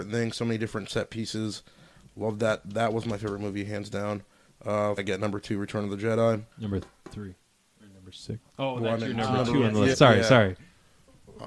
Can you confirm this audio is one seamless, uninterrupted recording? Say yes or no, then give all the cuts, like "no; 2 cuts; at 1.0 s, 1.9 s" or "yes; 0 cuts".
no; 3 cuts; at 5.0 s, 6.5 s, 9.9 s